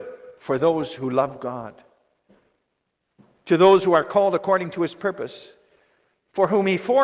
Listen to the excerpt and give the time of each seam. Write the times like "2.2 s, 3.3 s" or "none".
none